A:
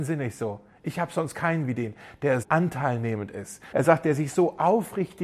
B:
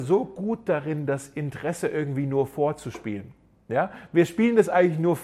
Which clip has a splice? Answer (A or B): A